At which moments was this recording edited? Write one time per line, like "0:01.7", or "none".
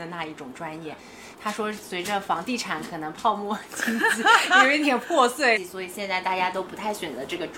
0:01.3
0:05.6